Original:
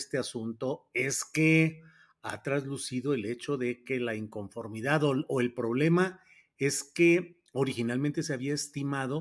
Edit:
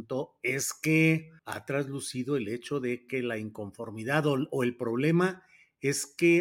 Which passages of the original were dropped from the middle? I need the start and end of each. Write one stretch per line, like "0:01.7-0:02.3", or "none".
0:01.9-0:02.2